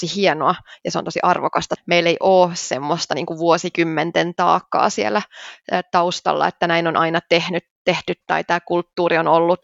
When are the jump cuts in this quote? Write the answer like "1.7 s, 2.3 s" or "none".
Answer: 1.8 s